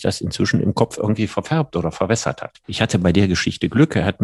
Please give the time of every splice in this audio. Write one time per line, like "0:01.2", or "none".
0:02.6